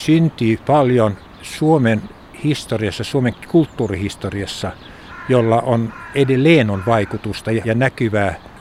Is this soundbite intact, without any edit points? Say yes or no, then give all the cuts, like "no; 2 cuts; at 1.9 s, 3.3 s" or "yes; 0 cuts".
no; 1 cut; at 7.6 s